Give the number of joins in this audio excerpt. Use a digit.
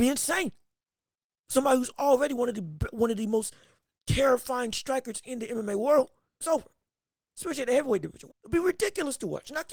2